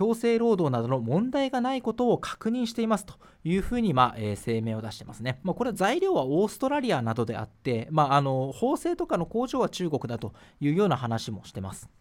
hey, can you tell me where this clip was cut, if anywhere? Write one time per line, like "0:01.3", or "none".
none